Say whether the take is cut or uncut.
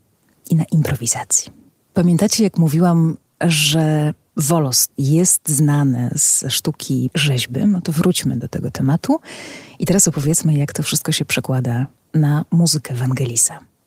cut